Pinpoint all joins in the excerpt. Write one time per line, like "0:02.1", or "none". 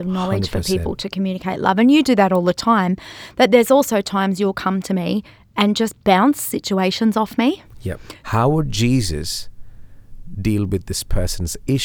0:08.2